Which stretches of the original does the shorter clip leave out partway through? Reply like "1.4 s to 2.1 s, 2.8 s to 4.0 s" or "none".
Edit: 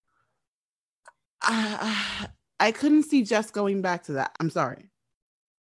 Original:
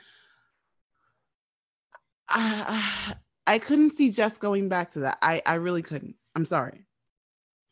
5.2 s to 6.3 s

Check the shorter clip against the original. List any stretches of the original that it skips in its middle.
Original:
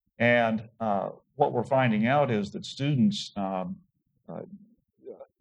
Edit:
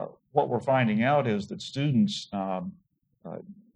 none

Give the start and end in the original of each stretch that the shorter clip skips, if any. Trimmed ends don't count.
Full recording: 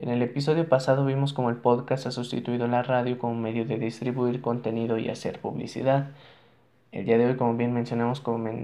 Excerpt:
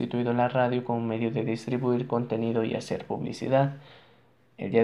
none

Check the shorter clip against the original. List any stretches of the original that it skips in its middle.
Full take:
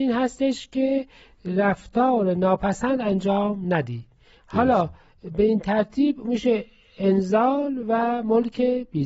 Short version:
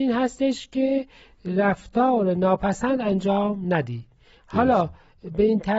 none

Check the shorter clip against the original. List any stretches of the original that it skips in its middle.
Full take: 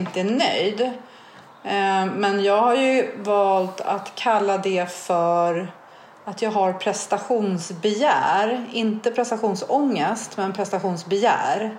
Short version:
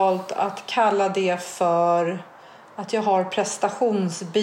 none

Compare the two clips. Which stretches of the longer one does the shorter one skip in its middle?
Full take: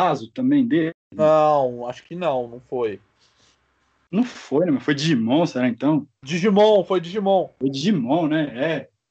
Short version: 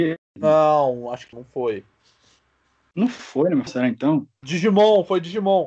2.1 s to 2.5 s, 4.8 s to 5.5 s

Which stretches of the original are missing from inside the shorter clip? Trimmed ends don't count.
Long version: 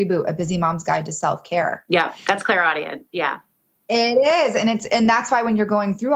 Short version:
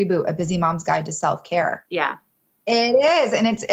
1.9 s to 3.1 s

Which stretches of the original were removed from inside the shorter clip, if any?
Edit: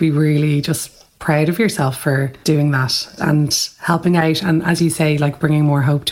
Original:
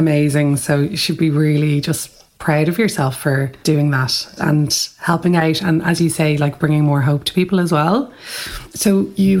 none

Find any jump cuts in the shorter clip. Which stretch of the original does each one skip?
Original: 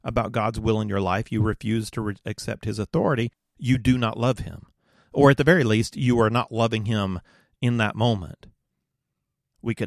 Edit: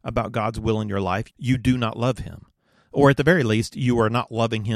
1.3 s to 3.5 s

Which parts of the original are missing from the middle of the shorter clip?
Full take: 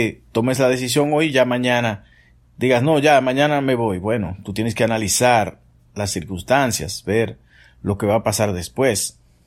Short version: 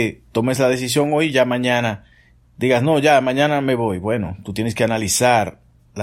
none

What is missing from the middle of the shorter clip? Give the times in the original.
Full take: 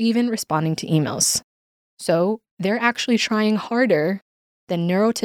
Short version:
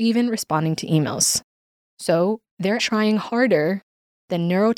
2.8 s to 3.2 s

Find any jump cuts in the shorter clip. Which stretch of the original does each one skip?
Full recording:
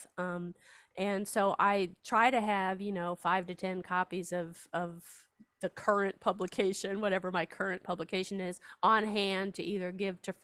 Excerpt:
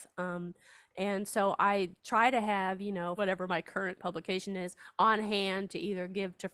3.2 s to 7.0 s

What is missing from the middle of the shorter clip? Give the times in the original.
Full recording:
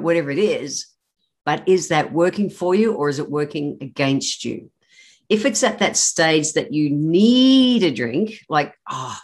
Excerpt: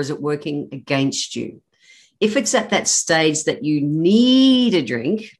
none

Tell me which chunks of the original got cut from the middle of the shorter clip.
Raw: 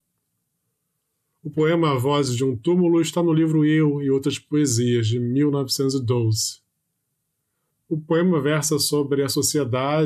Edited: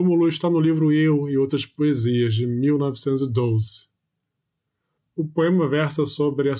none

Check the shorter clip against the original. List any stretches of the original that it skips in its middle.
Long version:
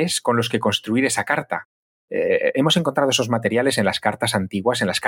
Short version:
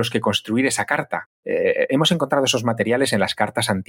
1.7 s to 2.0 s

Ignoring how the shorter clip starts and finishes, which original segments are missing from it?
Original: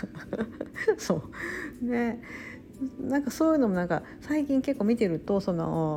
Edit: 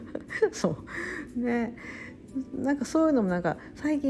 none

